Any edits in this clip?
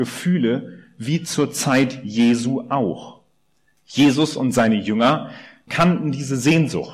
yes; 2 cuts; at 3.8 s, 5.7 s

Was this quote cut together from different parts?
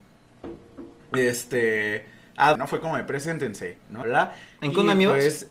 yes; 2 cuts; at 2.6 s, 4.0 s

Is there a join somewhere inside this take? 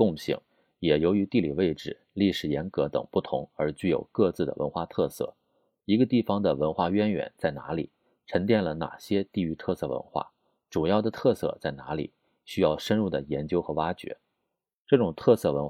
no; 0 cuts

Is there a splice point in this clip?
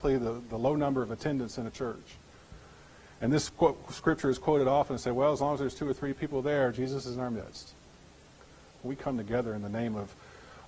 yes; 1 cut; at 8.7 s

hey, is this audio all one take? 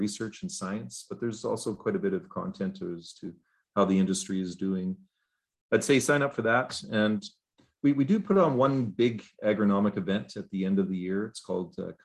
no; 1 cut; at 5.6 s

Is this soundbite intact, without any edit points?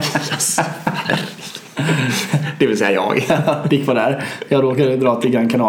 yes; 0 cuts

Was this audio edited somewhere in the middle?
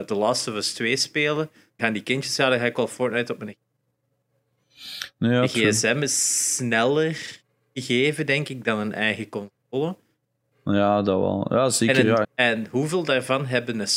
yes; 3 cuts; at 1.8 s, 10.5 s, 12.2 s

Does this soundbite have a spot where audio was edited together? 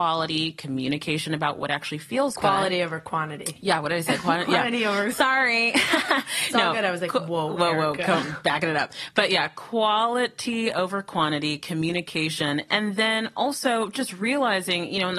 no; 0 cuts

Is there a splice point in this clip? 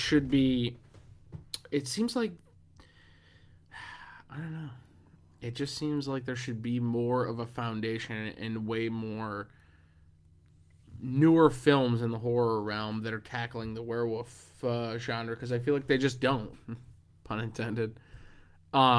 yes; 1 cut; at 16.5 s

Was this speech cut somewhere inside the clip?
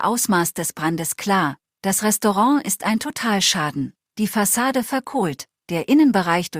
no; 0 cuts

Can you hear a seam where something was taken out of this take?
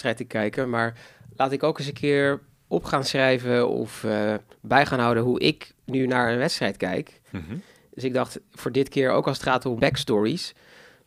yes; 2 cuts; at 7.3 s, 9.8 s

